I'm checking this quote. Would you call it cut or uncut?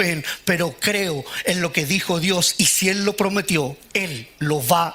uncut